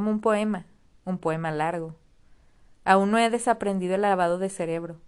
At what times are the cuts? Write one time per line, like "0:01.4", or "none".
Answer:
0:02.7